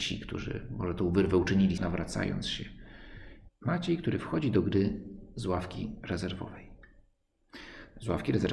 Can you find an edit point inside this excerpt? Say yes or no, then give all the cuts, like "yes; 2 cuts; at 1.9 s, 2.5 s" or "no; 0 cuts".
yes; 2 cuts; at 1.8 s, 3.5 s